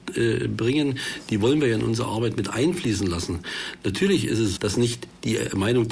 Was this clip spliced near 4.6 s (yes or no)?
yes